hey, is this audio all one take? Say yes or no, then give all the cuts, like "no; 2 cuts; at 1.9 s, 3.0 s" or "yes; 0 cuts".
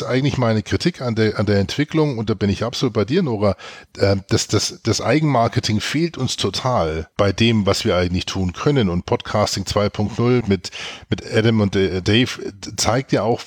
no; 2 cuts; at 7.1 s, 10.4 s